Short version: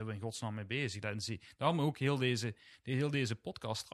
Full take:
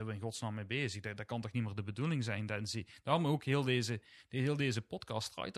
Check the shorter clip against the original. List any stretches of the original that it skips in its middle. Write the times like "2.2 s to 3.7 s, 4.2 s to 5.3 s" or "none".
1.0 s to 2.5 s